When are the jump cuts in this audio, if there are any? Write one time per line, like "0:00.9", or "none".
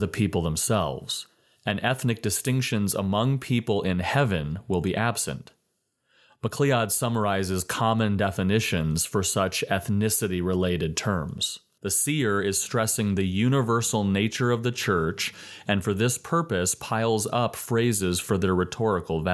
0:11.8